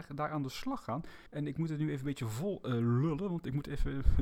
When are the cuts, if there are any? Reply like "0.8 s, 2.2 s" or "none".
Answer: 1.3 s